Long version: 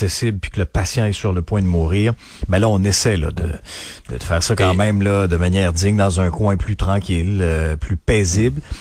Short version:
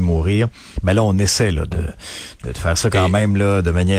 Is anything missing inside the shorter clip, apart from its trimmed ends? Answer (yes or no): no